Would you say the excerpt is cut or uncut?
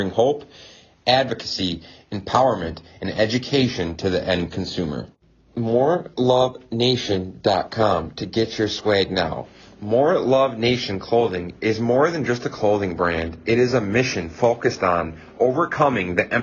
uncut